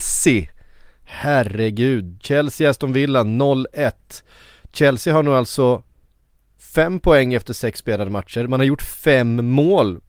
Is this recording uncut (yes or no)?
yes